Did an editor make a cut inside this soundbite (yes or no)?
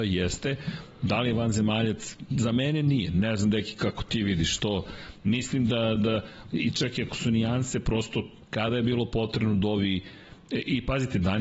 yes